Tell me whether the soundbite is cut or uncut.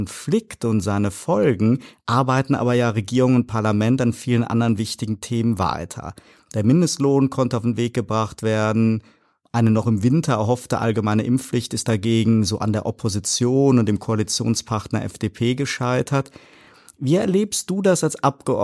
uncut